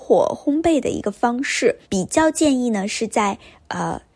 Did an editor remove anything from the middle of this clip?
yes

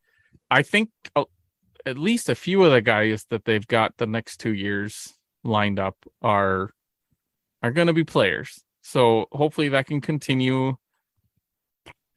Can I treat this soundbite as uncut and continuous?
yes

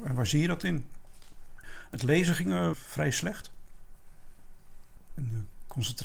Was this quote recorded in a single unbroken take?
no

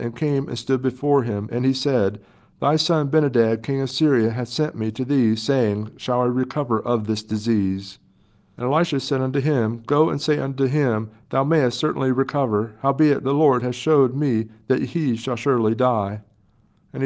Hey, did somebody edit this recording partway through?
no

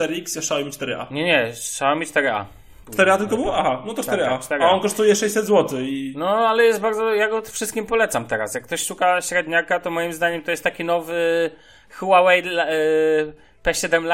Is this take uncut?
yes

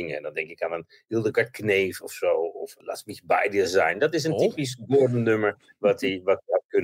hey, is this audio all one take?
yes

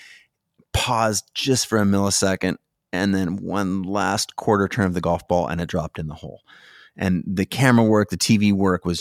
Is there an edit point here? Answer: no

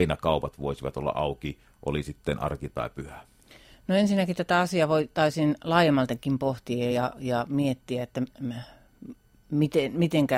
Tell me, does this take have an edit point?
no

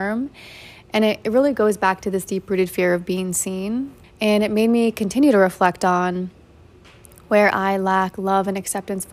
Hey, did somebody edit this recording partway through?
yes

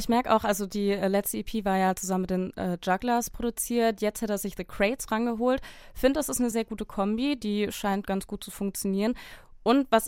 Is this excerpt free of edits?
no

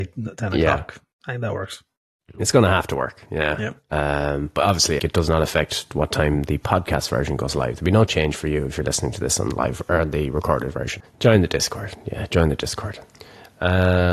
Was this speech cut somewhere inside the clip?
yes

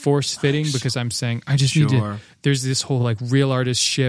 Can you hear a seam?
no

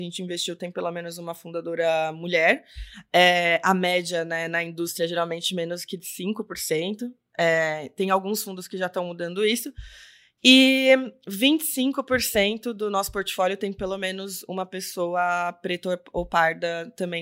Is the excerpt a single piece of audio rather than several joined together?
yes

